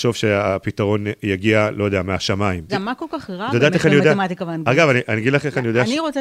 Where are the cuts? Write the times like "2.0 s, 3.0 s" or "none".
2.7 s